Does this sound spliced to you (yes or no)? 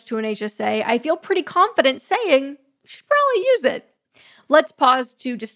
no